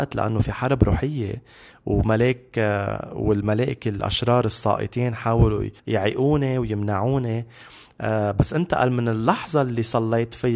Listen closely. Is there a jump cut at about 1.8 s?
no; 1 cut; at 5.8 s

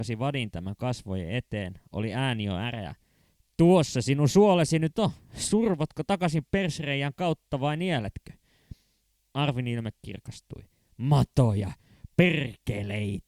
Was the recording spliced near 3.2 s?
no; 0 cuts

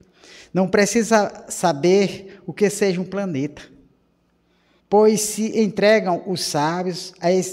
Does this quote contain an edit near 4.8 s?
yes; 1 cut; at 4.8 s

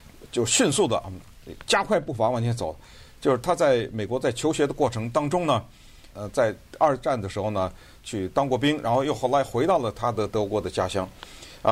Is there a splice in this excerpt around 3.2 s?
no; 2 cuts; at 6.1 s, 8.0 s

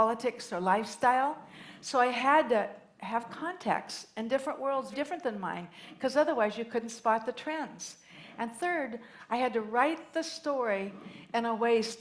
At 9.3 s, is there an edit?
no; 1 cut; at 4.9 s

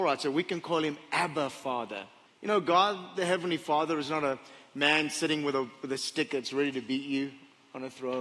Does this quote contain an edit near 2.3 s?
yes; 1 cut; at 2.3 s

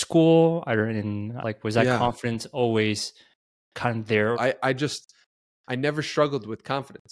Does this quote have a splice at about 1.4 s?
yes; 2 cuts; at 1.4 s, 4.3 s

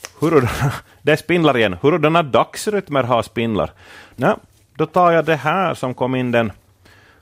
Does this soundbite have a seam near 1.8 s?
no; 1 cut; at 4.1 s

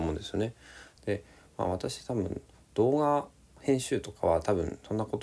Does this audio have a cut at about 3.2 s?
no; 1 cut; at 1.0 s

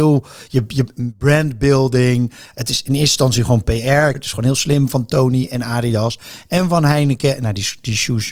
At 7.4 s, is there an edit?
no; 1 cut; at 4.1 s

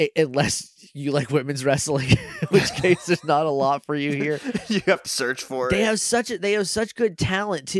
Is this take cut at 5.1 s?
yes; 1 cut; at 5.1 s

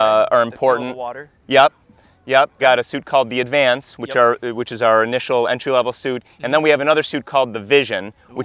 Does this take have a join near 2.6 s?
yes; 1 cut; at 2.6 s

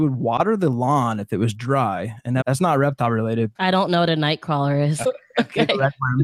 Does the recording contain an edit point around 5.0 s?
yes; 3 cuts; at 2.4 s, 3.6 s, 5.0 s

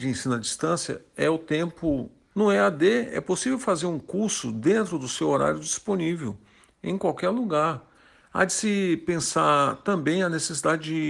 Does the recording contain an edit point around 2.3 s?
yes; 2 cuts; at 2.3 s, 8.2 s

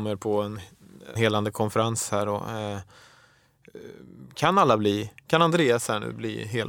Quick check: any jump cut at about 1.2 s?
yes; 1 cut; at 1.2 s

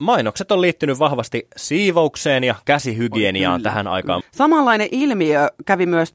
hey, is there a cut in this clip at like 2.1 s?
no; 1 cut; at 4.2 s

